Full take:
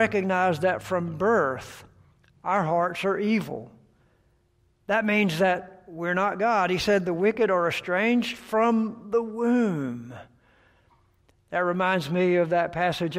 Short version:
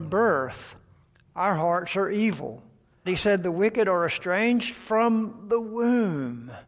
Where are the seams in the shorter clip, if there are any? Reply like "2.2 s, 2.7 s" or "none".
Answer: 3.1 s